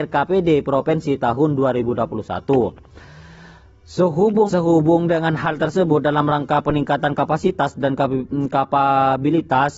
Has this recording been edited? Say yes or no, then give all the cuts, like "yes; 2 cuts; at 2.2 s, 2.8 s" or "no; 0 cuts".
yes; 1 cut; at 4.5 s